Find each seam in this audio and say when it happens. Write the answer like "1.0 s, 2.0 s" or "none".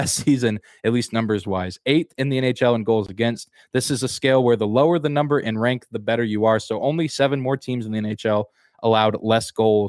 none